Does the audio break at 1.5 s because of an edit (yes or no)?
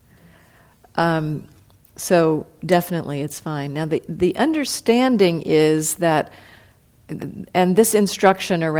no